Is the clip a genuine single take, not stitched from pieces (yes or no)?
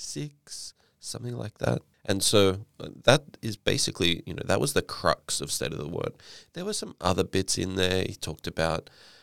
no